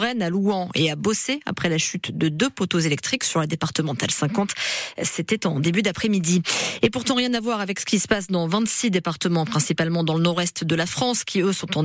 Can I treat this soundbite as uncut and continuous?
yes; 0 cuts

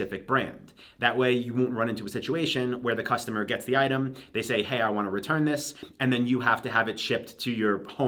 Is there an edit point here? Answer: no; 0 cuts

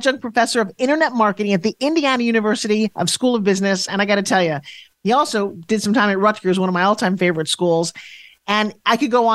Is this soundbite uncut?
yes; 0 cuts

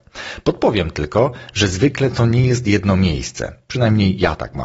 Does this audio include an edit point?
no; 0 cuts

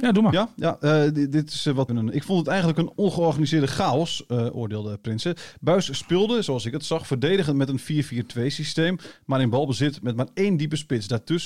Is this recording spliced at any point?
yes; 1 cut; at 1.9 s

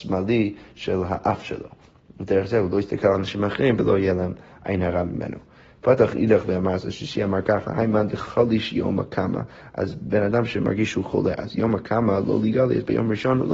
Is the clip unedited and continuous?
yes; 0 cuts

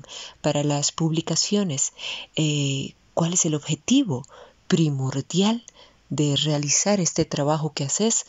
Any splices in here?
no; 0 cuts

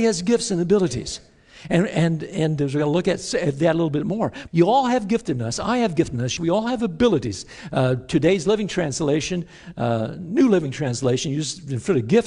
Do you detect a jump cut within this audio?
yes; 2 cuts; at 4.5 s, 6.4 s

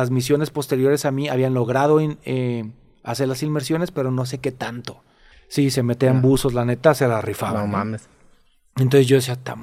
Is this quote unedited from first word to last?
no; 1 cut; at 5.3 s

